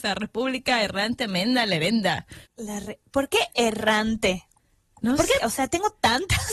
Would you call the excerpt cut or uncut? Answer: cut